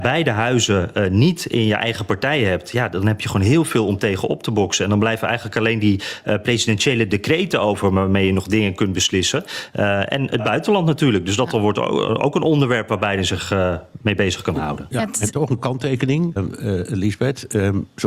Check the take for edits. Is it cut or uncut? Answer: cut